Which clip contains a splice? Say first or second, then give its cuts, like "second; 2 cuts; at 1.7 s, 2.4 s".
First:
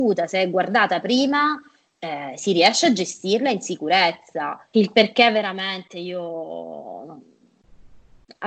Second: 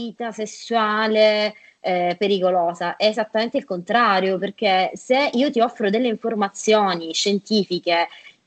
first; 1 cut; at 4.7 s